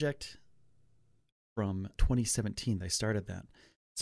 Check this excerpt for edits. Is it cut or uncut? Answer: cut